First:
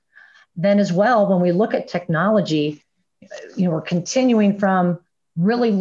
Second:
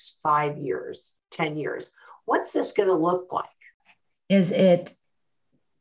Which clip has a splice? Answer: second; 1 cut; at 4.1 s

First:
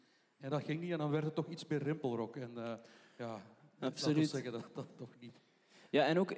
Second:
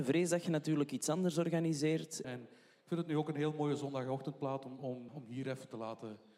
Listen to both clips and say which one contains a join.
second; 2 cuts; at 2.2 s, 5.1 s

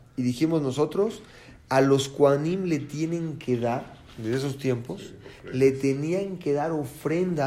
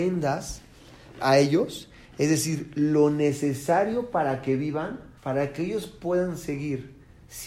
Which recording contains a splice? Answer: second; 2 cuts; at 1.1 s, 5.2 s

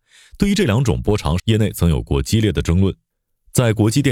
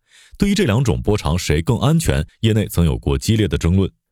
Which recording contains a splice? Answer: first; 1 cut; at 1.4 s

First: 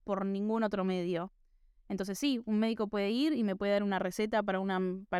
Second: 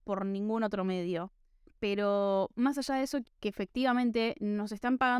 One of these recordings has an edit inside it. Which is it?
second; 2 cuts; at 1.7 s, 3.2 s

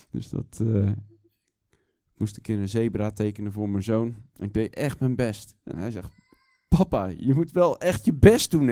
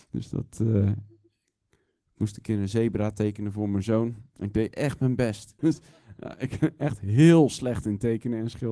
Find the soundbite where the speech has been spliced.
second; 1 cut; at 5.6 s

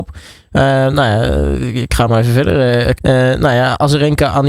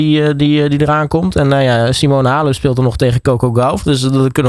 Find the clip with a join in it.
first; 1 cut; at 2.9 s

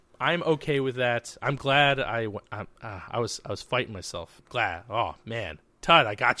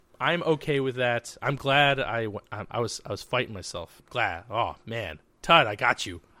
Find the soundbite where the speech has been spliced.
second; 1 cut; at 2.7 s

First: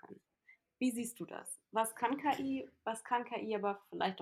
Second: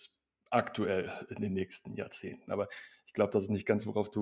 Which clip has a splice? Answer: second; 1 cut; at 2.4 s

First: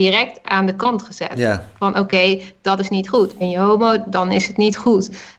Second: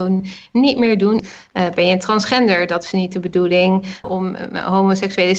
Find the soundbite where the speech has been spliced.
second; 2 cuts; at 1.2 s, 4.0 s

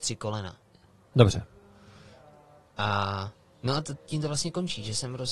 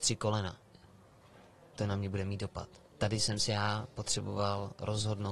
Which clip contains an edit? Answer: first; 1 cut; at 1.1 s

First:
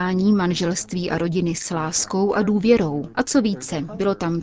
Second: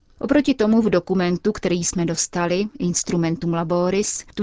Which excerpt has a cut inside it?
first; 1 cut; at 3.1 s

